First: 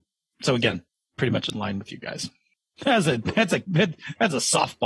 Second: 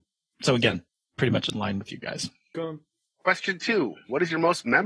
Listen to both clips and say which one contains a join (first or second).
second